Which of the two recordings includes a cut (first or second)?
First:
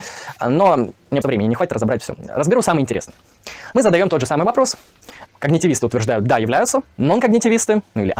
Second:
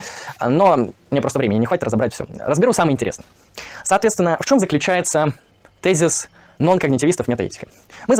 first